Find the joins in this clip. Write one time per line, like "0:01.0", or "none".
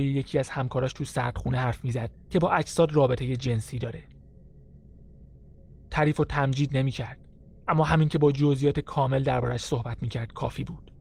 none